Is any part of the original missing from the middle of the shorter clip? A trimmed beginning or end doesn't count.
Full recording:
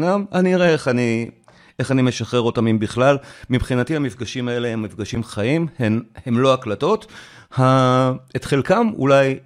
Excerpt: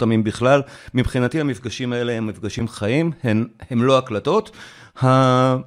no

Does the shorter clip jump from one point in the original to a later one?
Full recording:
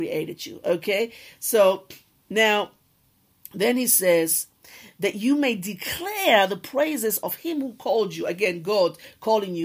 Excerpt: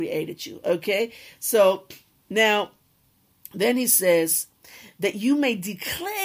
no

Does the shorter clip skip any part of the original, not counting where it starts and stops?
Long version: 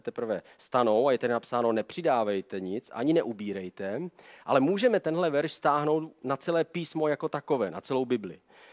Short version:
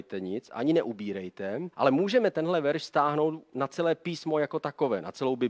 yes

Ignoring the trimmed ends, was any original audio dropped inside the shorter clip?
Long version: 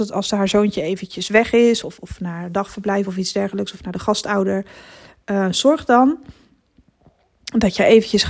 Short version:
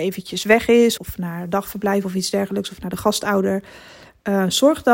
yes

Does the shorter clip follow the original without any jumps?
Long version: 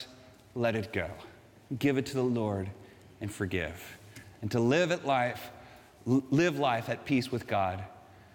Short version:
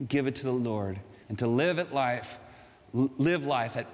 no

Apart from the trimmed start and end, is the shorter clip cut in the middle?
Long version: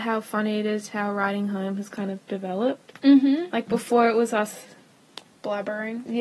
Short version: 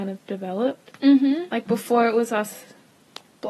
no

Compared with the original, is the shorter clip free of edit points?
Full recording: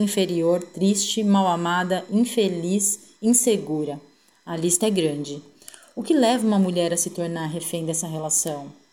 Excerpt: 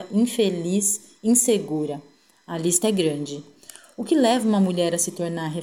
yes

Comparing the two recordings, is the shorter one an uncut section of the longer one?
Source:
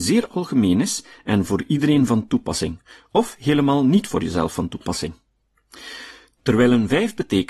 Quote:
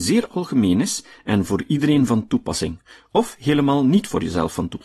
yes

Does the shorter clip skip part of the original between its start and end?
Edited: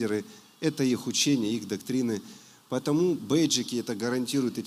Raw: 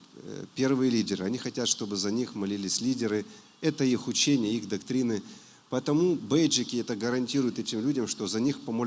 no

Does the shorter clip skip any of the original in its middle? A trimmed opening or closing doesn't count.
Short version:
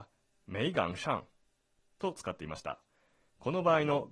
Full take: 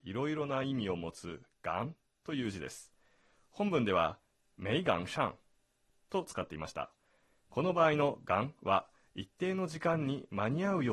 no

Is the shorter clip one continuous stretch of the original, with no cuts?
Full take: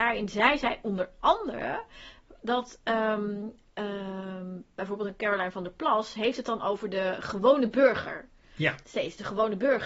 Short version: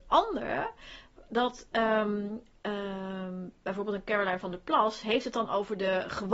yes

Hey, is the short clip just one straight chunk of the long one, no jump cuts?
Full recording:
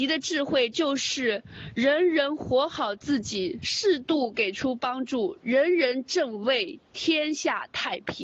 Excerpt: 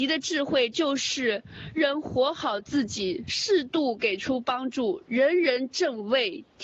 no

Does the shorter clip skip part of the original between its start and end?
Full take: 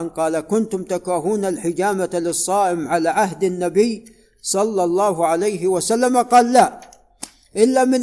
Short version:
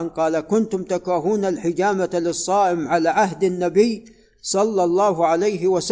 no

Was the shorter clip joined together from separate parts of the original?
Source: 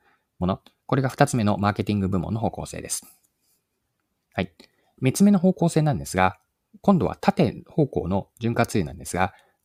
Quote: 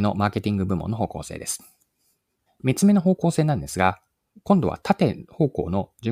yes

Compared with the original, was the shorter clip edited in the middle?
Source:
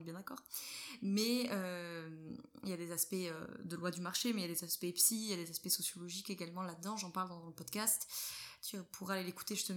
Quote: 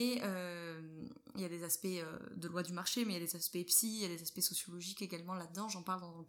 no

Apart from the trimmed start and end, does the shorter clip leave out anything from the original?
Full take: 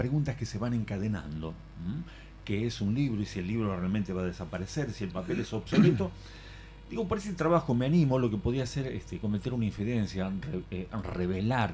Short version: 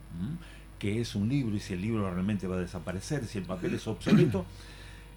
no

